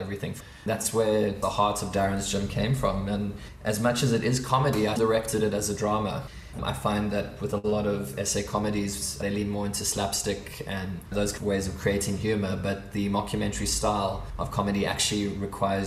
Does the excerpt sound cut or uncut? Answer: cut